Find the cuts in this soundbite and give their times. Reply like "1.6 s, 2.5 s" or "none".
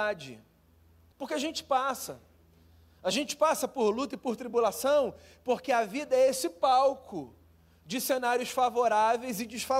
1.1 s